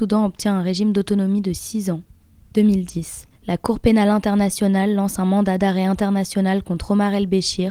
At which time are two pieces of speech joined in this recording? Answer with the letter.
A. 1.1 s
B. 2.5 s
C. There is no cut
B